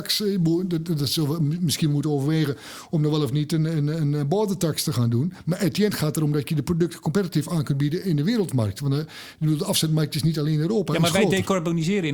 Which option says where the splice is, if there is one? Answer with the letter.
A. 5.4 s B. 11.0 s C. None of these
C